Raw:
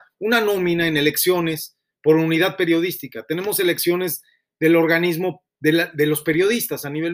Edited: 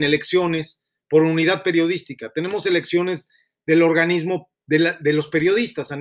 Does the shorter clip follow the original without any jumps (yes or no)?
yes